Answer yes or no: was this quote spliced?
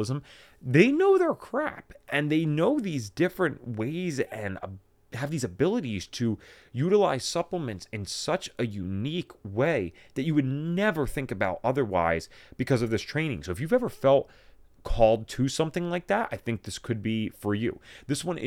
no